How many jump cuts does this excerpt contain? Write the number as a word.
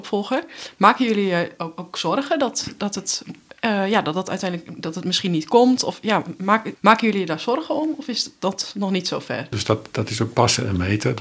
two